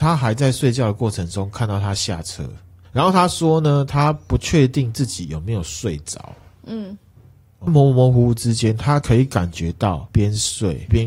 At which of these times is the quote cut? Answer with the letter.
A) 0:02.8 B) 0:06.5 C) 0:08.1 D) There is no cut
A